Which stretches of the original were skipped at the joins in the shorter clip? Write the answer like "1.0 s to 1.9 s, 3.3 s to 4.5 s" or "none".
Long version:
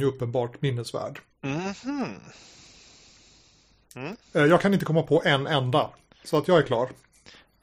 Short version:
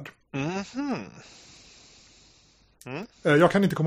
none